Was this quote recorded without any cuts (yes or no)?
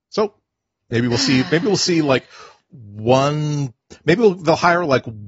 yes